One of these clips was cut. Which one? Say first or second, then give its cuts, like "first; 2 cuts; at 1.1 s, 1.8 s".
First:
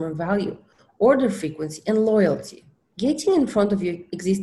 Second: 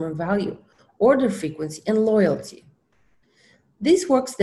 first; 1 cut; at 2.9 s